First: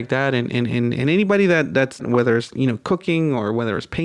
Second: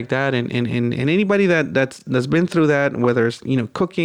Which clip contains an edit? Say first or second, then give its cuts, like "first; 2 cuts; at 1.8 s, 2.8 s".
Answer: first; 1 cut; at 2.0 s